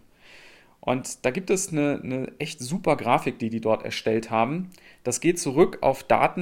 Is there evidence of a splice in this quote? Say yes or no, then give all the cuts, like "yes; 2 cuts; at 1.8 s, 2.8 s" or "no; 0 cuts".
no; 0 cuts